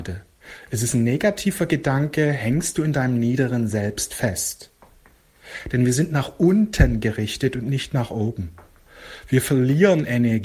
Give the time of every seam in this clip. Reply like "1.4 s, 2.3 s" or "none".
5.6 s